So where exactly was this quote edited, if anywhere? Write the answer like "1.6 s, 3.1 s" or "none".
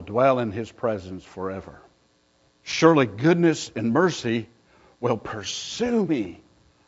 2.5 s